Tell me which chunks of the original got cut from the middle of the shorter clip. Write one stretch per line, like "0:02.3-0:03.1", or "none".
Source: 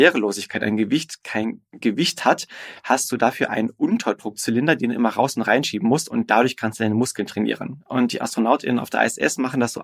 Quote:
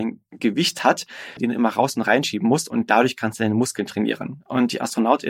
0:02.8-0:04.8